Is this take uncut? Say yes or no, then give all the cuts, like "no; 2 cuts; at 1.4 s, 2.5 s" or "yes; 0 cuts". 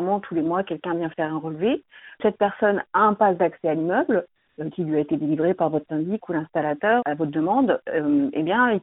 yes; 0 cuts